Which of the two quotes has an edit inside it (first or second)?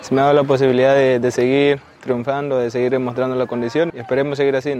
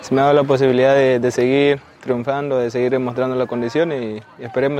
first